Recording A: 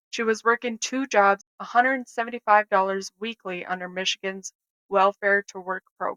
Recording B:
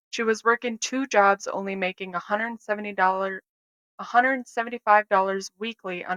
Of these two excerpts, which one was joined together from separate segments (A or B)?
A